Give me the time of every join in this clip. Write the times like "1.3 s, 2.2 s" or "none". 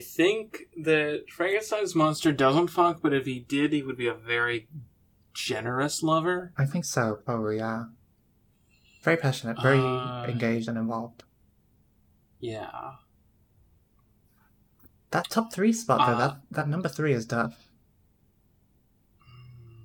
none